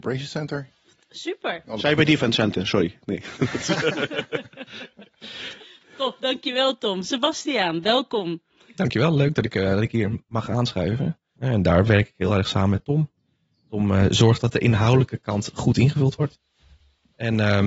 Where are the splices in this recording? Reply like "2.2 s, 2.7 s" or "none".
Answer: 11.4 s